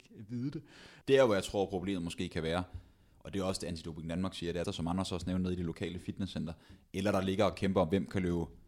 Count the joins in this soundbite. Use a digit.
2